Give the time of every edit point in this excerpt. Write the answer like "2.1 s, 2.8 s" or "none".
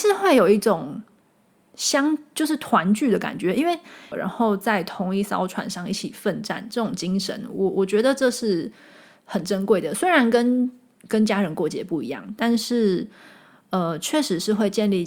4.1 s